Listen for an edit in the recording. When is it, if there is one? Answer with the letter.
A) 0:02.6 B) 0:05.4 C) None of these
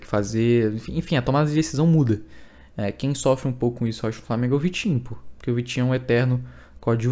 C